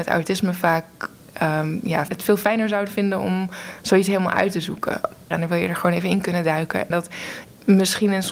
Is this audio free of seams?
no; 3 cuts; at 2.1 s, 5.3 s, 6.9 s

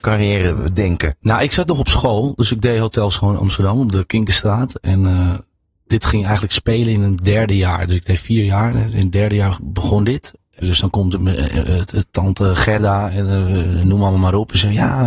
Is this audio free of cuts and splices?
no; 2 cuts; at 10.6 s, 12.1 s

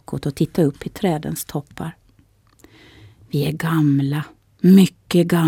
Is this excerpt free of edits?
yes; 0 cuts

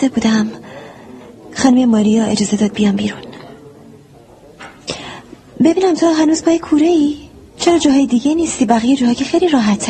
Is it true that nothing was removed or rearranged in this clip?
yes; 0 cuts

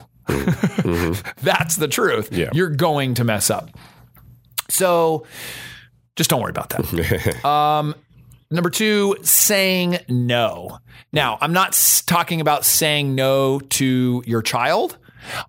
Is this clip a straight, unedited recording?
yes; 0 cuts

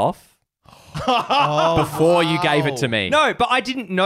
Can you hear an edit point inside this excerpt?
no; 0 cuts

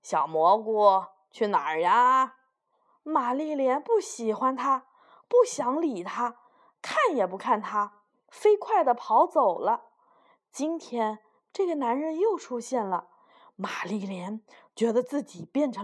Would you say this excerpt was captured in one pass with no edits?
yes; 0 cuts

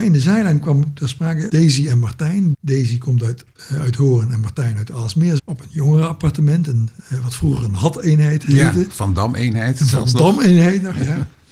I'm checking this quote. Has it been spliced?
yes; 3 cuts; at 1.5 s, 2.5 s, 5.4 s

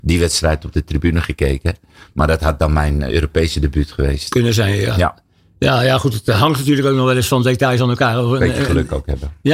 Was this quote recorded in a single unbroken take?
yes; 0 cuts

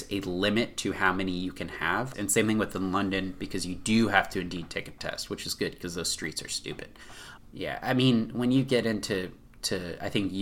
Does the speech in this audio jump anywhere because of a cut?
yes; 2 cuts; at 2.1 s, 7.4 s

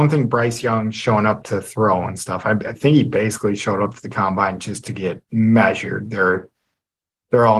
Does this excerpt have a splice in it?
no; 0 cuts

